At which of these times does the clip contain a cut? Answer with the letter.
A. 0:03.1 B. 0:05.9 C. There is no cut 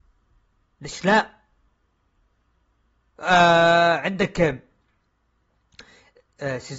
C